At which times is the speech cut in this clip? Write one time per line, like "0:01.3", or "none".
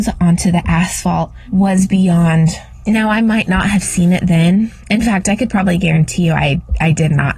0:02.8